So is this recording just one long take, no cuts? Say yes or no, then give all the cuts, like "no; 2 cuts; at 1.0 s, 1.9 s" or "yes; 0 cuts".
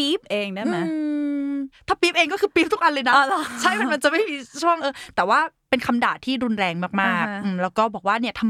no; 1 cut; at 4.8 s